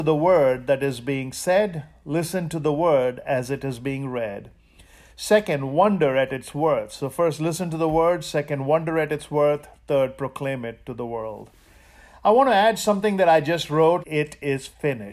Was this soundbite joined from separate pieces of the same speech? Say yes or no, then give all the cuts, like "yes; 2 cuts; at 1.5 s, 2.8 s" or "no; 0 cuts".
yes; 1 cut; at 14.0 s